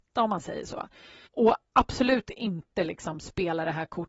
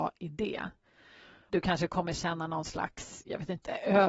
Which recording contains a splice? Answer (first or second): second